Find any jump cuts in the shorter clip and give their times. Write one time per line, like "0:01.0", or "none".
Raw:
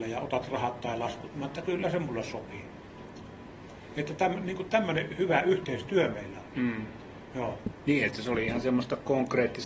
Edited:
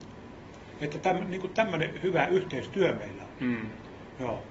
none